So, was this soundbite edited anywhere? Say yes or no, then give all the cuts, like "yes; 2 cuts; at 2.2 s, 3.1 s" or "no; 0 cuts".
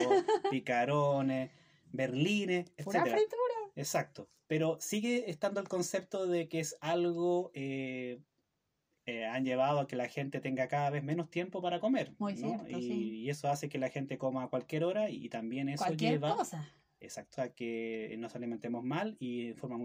yes; 2 cuts; at 9.0 s, 17.4 s